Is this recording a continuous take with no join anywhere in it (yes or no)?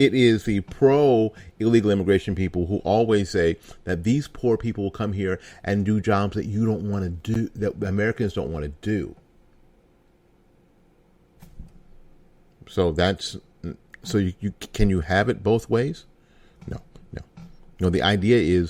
yes